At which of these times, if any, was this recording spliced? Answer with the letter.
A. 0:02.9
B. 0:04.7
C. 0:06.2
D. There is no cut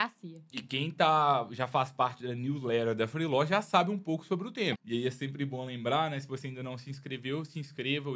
B